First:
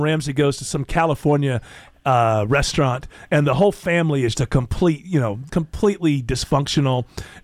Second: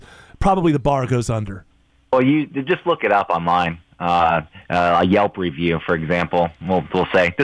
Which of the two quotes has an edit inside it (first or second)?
first